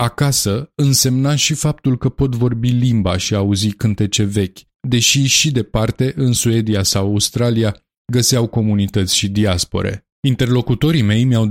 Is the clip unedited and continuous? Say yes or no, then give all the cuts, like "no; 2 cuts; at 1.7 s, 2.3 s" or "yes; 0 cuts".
no; 1 cut; at 10.1 s